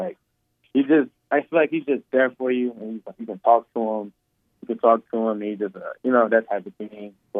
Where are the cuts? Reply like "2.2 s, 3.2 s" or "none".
none